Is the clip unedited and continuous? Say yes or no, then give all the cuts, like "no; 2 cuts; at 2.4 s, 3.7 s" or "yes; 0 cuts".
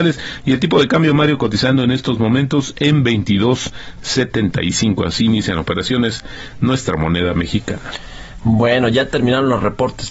yes; 0 cuts